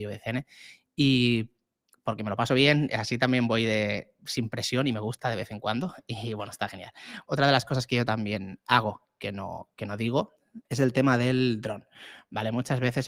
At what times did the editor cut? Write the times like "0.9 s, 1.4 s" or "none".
7.3 s, 10.6 s